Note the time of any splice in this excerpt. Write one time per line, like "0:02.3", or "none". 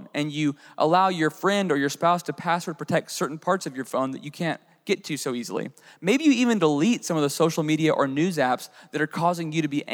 none

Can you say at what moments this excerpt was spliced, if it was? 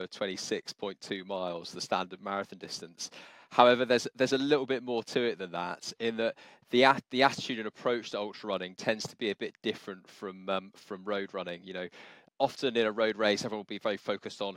0:12.3

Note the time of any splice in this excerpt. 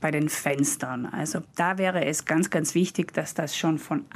none

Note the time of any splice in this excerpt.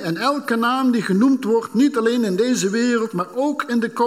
none

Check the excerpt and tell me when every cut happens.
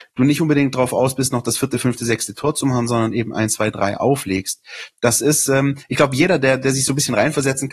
none

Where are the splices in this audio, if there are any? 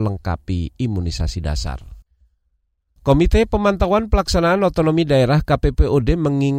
none

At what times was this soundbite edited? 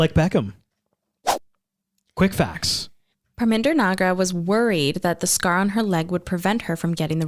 none

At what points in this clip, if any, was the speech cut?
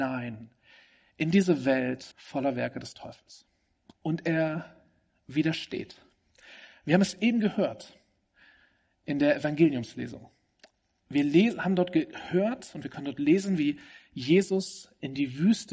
0:02.1
0:03.9

